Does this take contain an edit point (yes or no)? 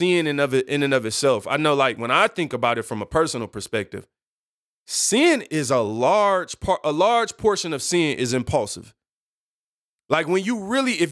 no